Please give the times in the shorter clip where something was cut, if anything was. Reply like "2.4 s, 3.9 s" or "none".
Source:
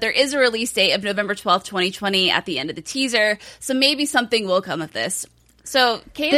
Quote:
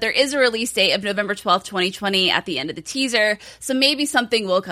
none

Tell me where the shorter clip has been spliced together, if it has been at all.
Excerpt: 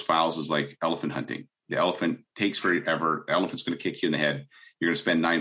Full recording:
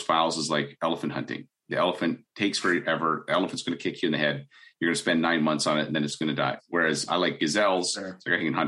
none

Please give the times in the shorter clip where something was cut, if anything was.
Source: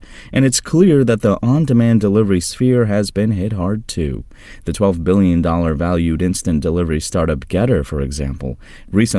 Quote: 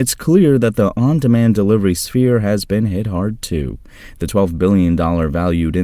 none

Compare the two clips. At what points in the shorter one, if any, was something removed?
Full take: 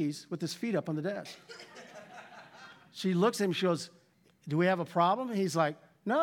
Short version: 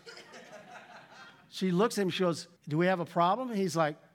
2.6 s

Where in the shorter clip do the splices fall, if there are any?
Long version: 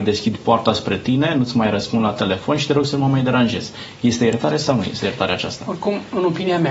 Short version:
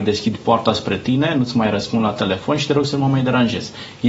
none

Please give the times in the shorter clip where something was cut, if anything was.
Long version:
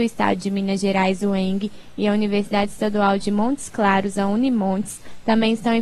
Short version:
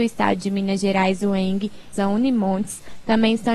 1.9 s

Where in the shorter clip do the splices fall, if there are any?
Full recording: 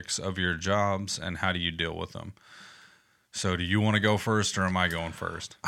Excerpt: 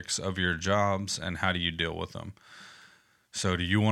none

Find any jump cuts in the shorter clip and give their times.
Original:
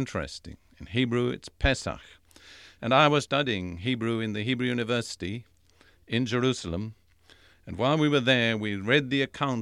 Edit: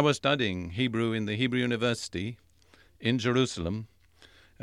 none

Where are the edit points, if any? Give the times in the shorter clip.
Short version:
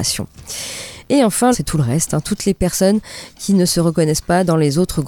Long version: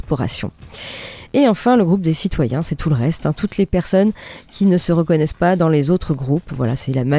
1.5 s

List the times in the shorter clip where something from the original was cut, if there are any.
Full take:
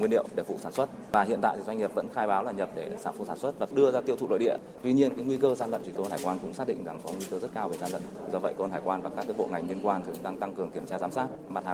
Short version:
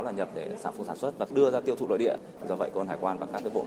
2.4 s

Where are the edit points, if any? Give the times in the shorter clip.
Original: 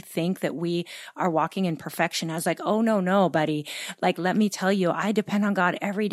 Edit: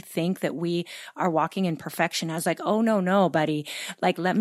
none

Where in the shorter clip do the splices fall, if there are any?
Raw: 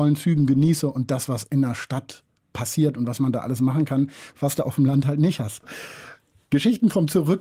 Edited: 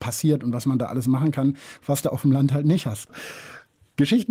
none

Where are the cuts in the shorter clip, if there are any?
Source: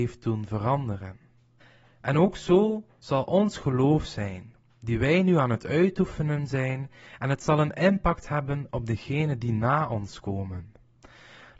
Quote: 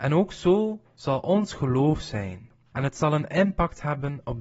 2.7 s

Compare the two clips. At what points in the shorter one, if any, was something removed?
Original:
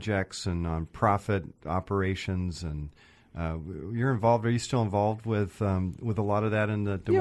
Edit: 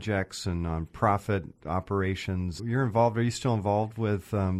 2.6 s

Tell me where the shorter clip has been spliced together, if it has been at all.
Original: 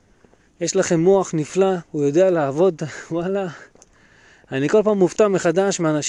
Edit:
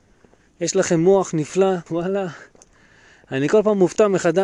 1.9 s

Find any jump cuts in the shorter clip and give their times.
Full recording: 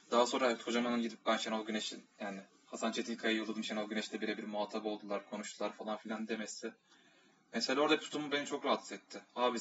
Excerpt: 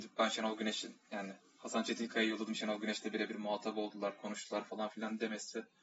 none

